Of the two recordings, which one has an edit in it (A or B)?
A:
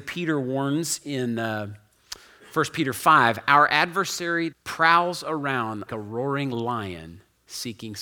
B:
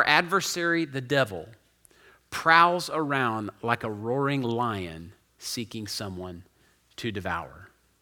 A